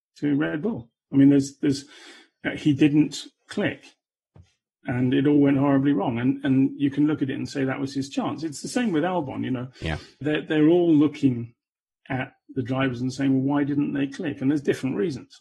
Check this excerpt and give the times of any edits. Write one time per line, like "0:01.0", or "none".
0:10.2

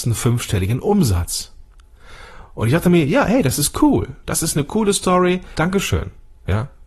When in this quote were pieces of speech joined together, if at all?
0:05.5

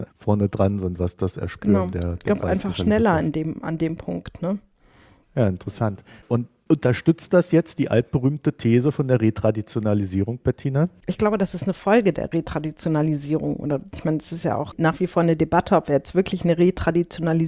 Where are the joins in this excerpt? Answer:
0:05.2

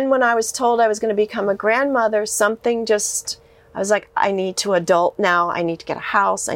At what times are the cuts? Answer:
none

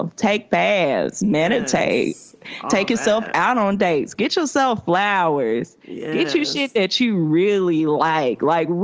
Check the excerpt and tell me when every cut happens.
none

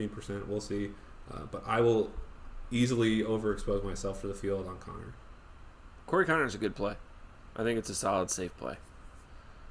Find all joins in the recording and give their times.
none

